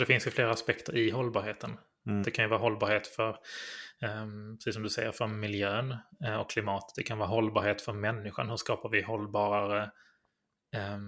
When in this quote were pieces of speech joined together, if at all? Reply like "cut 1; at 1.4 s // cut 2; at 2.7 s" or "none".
cut 1; at 2.2 s